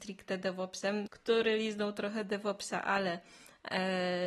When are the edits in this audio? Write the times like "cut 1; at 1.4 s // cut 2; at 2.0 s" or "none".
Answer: cut 1; at 1.1 s